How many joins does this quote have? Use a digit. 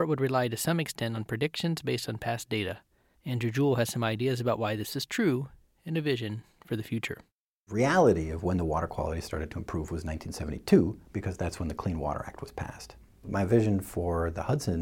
1